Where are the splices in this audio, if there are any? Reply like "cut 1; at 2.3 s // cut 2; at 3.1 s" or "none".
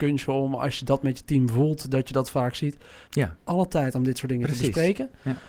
cut 1; at 3.1 s